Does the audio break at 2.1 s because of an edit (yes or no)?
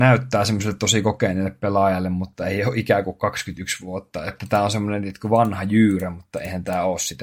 no